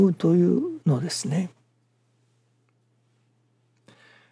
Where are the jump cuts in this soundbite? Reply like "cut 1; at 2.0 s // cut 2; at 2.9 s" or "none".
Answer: none